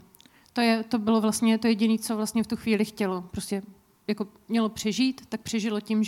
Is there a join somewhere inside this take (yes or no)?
no